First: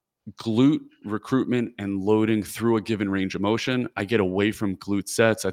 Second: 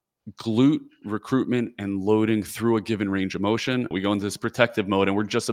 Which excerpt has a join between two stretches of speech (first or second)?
second